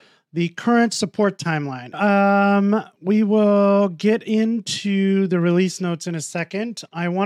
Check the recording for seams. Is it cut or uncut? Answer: cut